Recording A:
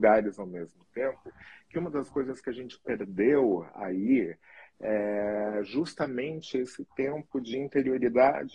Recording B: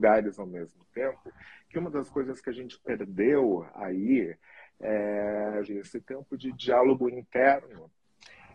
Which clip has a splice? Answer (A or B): B